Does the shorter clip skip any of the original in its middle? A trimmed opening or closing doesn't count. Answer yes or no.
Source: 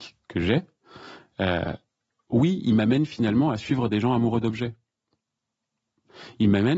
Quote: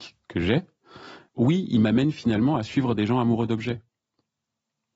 yes